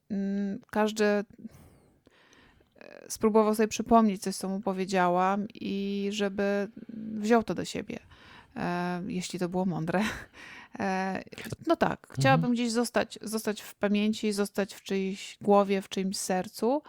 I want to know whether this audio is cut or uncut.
cut